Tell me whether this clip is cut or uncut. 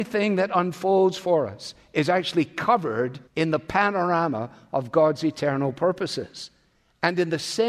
cut